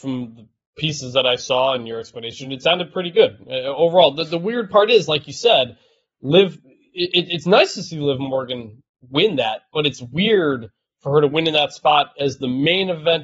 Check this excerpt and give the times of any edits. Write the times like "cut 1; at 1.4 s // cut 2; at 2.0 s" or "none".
none